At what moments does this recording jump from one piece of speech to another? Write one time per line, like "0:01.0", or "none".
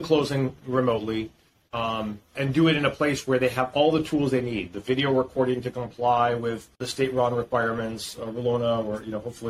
0:02.3
0:06.7